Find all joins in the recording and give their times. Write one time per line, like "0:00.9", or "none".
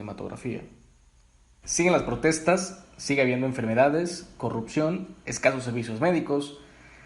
0:01.6